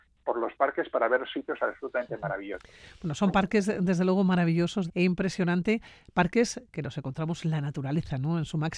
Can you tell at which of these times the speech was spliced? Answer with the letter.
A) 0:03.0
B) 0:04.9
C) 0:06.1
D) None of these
B